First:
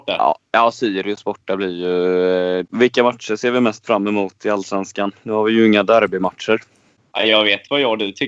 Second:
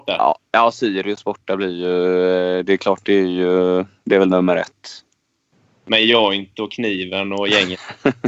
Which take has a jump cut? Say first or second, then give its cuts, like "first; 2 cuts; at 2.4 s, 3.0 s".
first; 1 cut; at 2.6 s